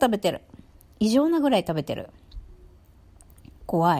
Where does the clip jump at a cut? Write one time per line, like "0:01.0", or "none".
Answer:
none